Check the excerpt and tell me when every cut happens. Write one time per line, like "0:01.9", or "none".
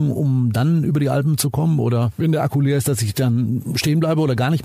none